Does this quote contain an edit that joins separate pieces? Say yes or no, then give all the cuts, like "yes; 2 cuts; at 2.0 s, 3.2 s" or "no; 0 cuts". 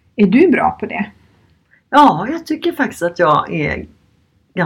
no; 0 cuts